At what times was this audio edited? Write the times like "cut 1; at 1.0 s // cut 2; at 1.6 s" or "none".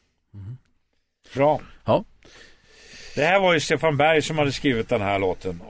cut 1; at 1.3 s

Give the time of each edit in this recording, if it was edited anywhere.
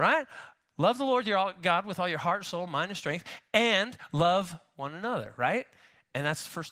none

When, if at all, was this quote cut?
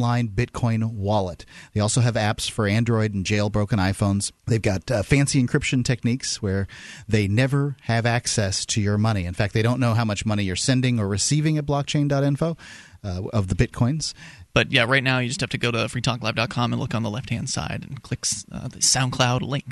cut 1; at 4.4 s // cut 2; at 14.5 s

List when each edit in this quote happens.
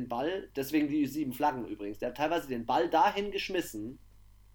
none

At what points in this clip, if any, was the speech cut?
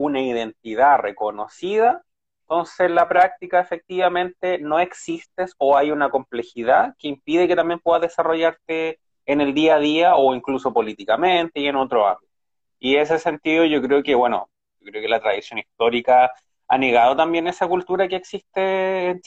none

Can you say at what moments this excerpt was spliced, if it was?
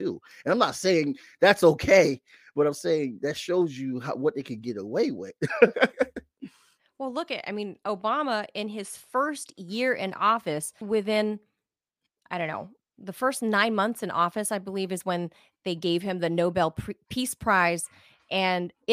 cut 1; at 10.8 s // cut 2; at 12.8 s

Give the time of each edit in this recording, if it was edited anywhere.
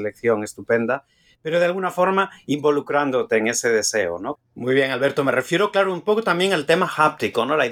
cut 1; at 4.4 s

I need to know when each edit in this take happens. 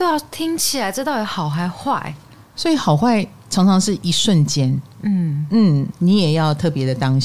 cut 1; at 5.9 s

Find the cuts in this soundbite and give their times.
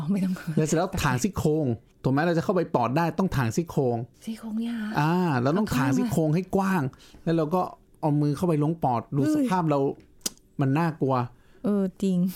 cut 1; at 4.1 s

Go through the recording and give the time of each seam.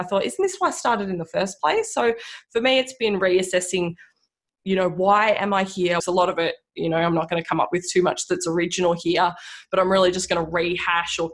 cut 1; at 6.0 s

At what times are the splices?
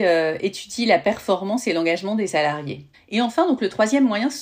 cut 1; at 2.9 s

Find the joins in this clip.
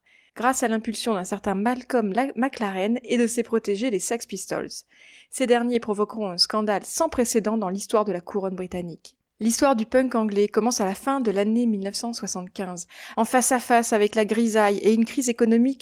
cut 1; at 13.1 s

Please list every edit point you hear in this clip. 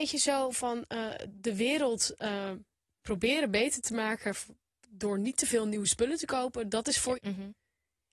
cut 1; at 7.2 s

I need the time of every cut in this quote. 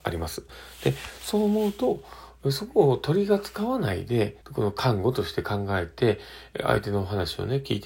cut 1; at 4.4 s

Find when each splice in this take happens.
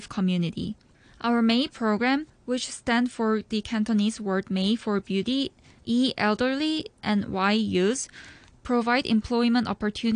cut 1; at 5.8 s

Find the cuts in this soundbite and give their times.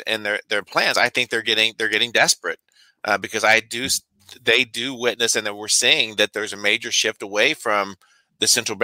none

